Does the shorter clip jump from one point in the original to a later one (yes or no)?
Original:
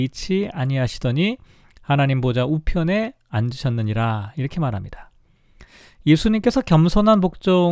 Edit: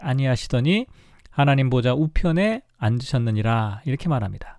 no